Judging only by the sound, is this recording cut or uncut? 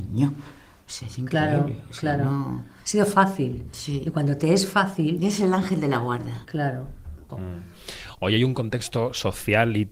cut